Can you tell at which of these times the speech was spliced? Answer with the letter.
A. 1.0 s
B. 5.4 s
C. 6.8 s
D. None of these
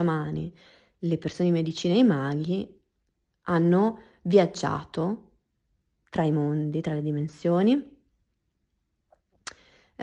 D